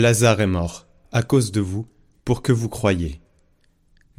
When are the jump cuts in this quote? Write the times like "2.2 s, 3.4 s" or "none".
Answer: 1.0 s